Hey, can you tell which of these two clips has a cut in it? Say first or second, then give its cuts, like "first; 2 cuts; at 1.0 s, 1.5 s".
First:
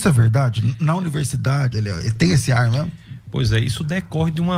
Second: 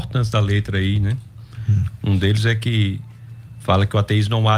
first; 1 cut; at 1.7 s